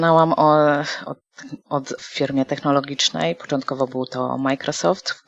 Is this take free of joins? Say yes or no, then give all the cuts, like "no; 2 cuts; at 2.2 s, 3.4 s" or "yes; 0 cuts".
no; 1 cut; at 2.0 s